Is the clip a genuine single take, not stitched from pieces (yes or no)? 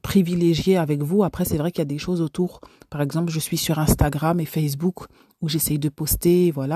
yes